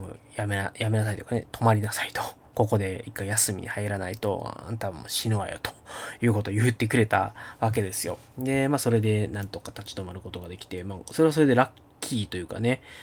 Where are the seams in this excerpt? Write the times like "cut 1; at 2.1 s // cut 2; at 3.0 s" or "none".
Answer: none